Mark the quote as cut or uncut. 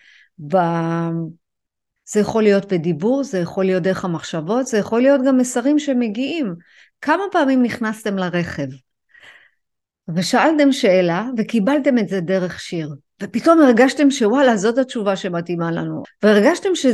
cut